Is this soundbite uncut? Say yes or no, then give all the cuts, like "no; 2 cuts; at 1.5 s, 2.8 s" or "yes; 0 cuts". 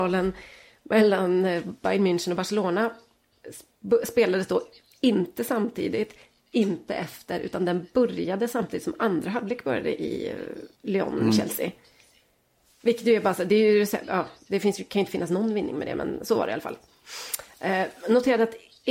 no; 1 cut; at 10.7 s